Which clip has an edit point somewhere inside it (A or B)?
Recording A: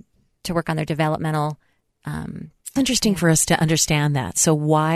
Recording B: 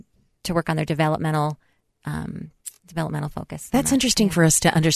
A